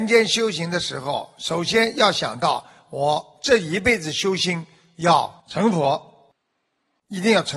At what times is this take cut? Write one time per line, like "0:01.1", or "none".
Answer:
0:05.4